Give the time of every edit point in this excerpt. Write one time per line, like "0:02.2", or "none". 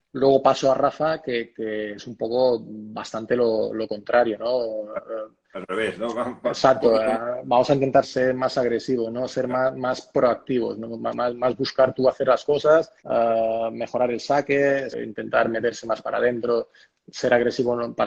0:08.0
0:13.0
0:14.9